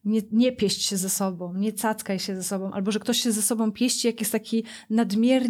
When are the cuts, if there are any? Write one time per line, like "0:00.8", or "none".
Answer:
none